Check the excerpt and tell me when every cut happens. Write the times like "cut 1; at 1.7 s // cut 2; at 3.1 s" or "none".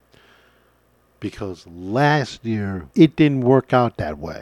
cut 1; at 2.9 s